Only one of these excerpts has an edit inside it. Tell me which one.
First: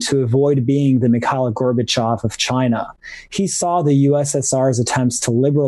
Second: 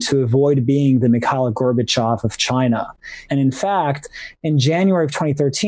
second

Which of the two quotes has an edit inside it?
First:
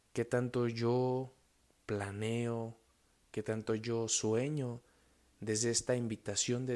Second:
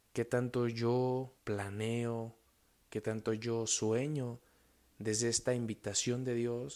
second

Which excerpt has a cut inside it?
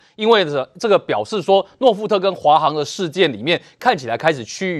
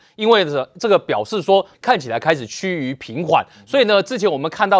second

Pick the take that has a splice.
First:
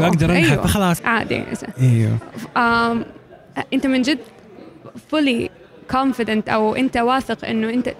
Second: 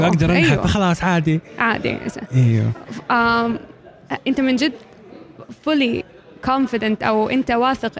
first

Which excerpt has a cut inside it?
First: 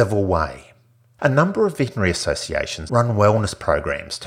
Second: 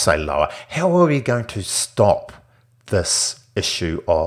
first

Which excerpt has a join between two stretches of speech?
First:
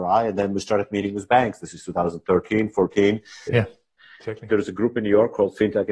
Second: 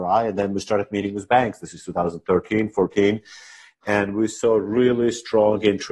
first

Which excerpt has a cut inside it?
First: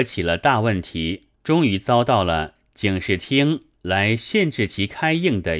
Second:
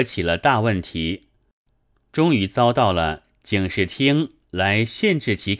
first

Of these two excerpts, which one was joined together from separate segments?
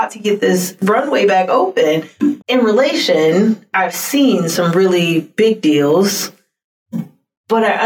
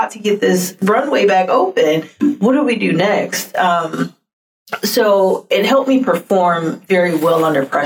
first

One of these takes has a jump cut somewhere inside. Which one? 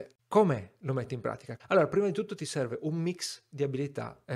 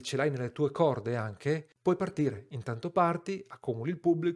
first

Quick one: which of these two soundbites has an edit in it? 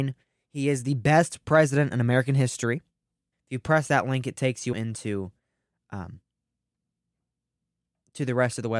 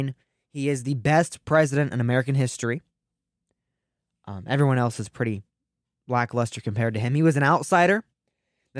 first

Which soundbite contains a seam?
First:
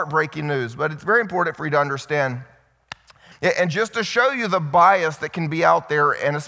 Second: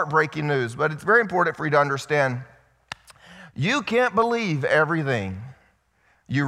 first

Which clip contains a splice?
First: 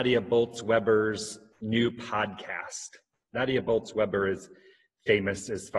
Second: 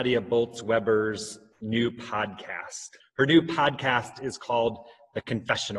second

